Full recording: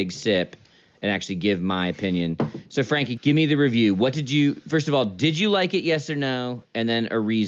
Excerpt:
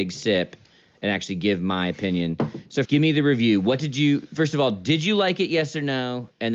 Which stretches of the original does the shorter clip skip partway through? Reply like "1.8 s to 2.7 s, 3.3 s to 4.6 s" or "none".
2.8 s to 3.2 s